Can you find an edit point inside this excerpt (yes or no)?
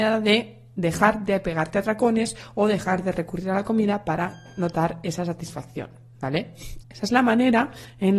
yes